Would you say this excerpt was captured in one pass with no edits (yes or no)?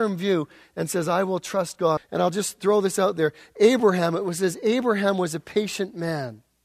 no